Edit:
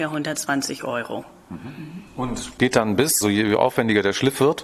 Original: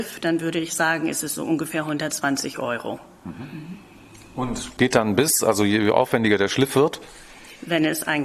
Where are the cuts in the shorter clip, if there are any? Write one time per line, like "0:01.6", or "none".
0:02.1
0:03.2